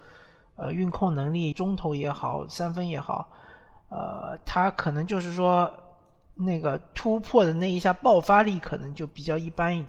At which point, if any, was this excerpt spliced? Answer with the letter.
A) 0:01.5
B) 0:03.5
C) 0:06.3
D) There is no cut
A